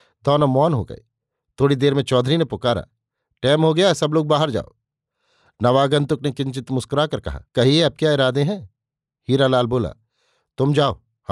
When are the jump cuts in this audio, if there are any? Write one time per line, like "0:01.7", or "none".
0:07.5